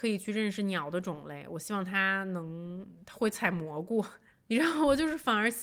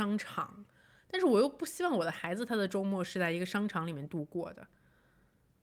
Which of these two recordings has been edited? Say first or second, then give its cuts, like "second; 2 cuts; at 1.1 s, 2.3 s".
first; 1 cut; at 4.3 s